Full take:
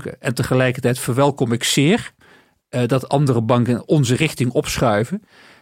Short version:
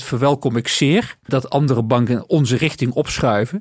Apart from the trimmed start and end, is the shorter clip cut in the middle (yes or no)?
yes